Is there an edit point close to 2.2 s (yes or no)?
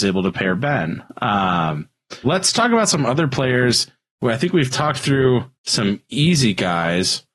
yes